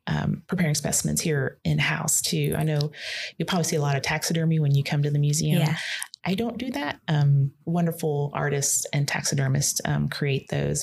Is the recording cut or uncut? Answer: uncut